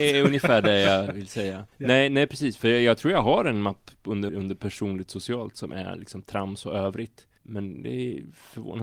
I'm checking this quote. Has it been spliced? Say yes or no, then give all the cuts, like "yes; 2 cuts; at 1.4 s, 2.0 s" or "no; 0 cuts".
yes; 3 cuts; at 1.7 s, 4.3 s, 7.4 s